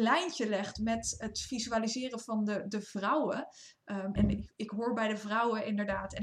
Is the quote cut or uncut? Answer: cut